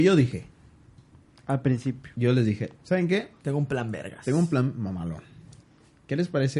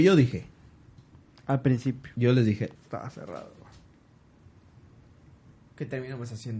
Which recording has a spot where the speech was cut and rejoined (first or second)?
second